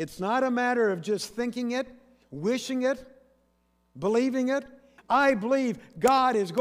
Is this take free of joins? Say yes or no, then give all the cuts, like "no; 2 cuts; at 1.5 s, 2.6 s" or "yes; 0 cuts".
no; 1 cut; at 5.0 s